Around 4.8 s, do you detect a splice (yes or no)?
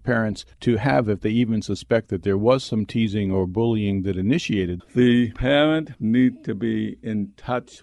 yes